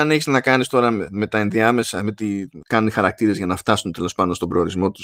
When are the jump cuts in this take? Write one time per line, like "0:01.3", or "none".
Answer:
0:02.6